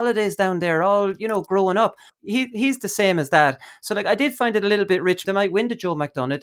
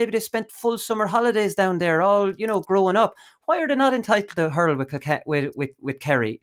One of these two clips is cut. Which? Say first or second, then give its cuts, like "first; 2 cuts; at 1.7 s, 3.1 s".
first; 2 cuts; at 2.1 s, 5.2 s